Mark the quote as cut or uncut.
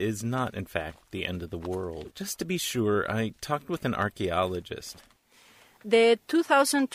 cut